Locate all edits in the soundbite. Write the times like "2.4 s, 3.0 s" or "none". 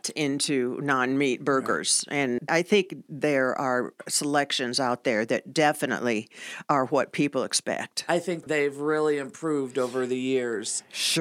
none